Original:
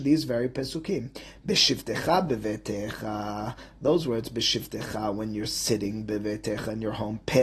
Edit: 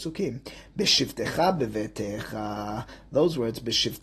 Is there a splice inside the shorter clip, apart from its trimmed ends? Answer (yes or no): no